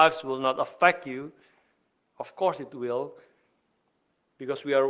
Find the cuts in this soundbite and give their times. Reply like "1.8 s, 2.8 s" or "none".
none